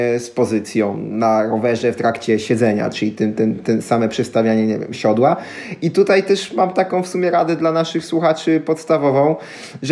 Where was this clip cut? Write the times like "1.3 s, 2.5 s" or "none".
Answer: none